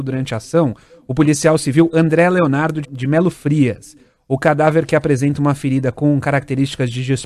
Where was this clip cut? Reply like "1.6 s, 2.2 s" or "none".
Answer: 2.8 s

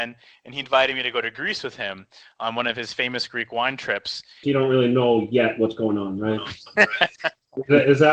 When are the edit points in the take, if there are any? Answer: 4.4 s

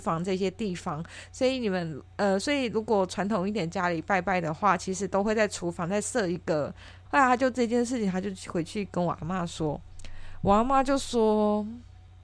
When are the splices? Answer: 7.1 s

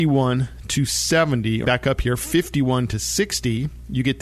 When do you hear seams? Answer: 1.6 s

